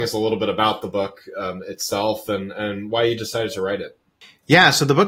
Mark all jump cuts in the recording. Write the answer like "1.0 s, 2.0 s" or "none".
none